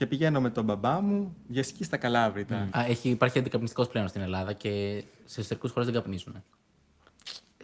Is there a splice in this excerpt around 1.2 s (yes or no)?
no